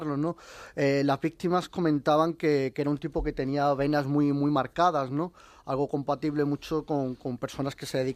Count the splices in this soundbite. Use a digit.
0